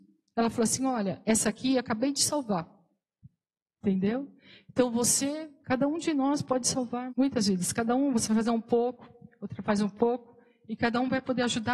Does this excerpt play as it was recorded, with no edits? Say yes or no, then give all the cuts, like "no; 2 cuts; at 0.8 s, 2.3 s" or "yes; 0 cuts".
no; 1 cut; at 7.1 s